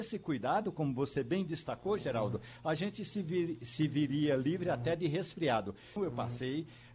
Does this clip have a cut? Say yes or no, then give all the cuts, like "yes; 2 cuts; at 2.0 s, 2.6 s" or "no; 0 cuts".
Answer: yes; 1 cut; at 6.0 s